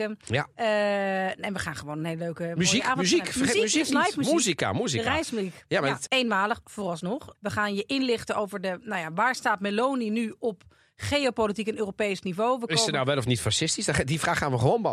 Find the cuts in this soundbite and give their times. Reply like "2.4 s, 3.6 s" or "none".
6.1 s, 7.3 s